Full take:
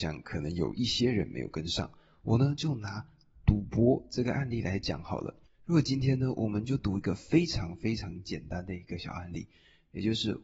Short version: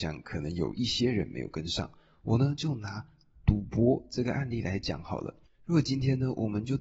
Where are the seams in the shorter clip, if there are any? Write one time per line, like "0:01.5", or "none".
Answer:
none